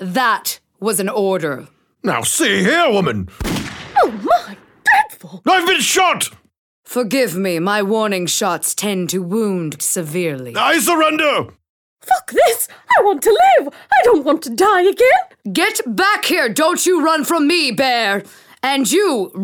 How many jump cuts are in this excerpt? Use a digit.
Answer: 1